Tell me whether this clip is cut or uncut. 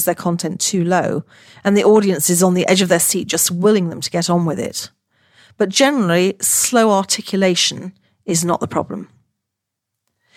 uncut